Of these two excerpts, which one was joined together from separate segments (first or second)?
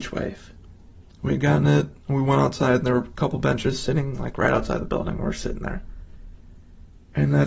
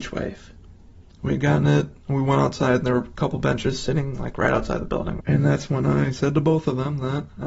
second